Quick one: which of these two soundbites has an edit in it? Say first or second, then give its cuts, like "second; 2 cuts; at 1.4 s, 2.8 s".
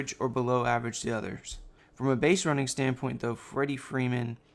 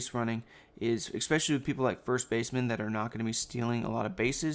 first; 1 cut; at 1.8 s